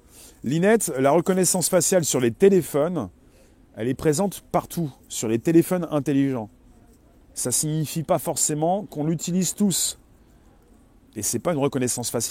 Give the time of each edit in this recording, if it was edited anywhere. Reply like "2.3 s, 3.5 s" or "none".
none